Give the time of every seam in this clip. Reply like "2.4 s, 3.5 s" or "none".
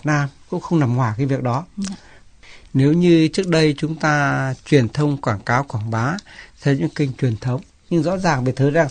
2.6 s